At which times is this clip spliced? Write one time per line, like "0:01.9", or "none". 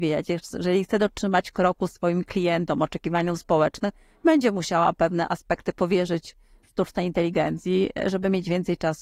none